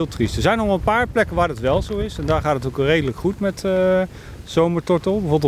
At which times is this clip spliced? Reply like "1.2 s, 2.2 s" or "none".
none